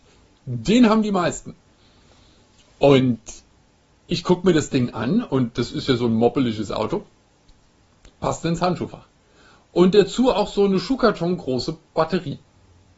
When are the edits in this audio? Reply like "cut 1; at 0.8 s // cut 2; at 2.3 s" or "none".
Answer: cut 1; at 8.0 s